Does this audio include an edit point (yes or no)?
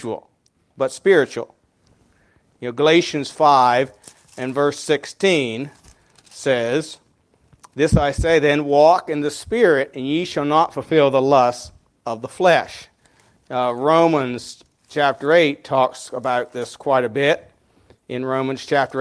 no